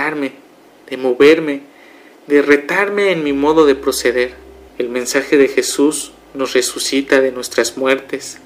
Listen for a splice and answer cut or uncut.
cut